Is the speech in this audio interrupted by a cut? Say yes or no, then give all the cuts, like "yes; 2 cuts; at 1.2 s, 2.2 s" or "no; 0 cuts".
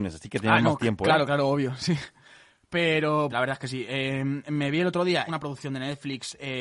yes; 2 cuts; at 3.3 s, 5.3 s